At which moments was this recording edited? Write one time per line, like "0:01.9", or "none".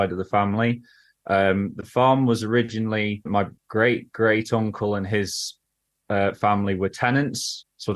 none